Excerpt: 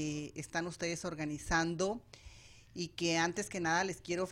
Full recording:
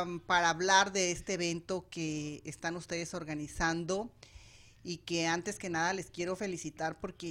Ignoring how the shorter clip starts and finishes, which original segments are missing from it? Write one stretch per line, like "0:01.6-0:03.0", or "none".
none